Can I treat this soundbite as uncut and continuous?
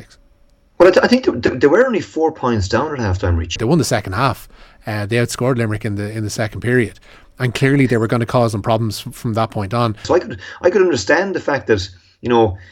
no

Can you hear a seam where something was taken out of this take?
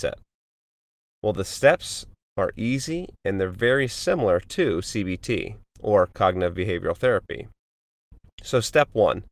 no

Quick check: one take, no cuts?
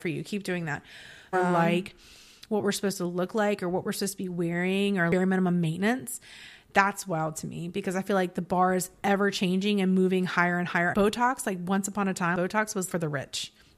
no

